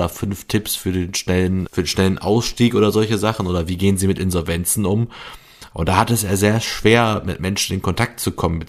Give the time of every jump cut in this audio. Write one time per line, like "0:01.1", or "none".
0:01.7
0:05.7

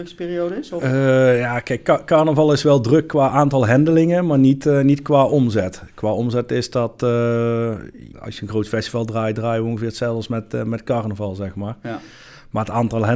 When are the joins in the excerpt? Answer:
0:08.1

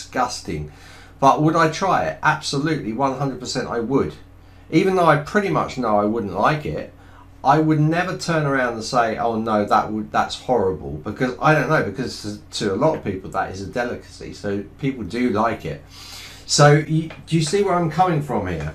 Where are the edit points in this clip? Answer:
none

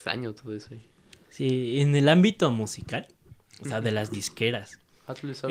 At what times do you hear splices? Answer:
none

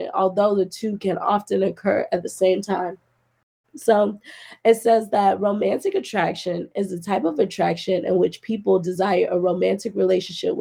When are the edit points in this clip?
0:03.6

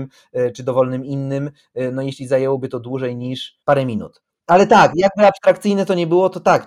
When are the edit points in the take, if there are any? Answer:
0:03.6

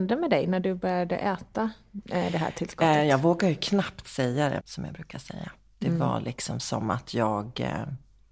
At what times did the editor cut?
0:04.6

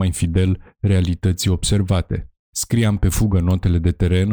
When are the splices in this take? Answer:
0:02.4

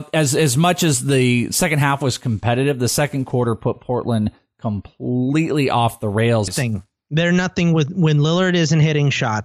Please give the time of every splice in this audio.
0:06.5

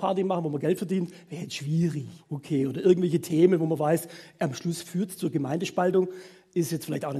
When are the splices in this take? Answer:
0:02.2

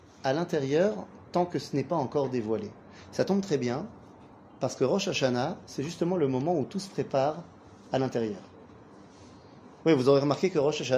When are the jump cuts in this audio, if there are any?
none

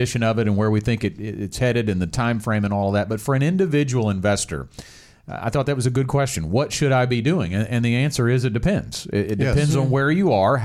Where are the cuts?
none

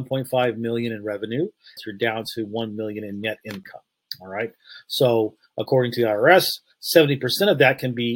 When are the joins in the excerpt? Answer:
0:01.8

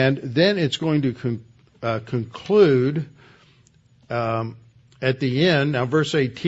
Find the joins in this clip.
none

